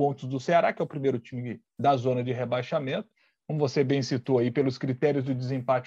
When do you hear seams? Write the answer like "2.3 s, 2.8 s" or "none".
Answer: none